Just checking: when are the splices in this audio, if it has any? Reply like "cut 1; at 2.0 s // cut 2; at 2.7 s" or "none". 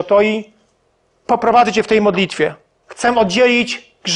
cut 1; at 2.8 s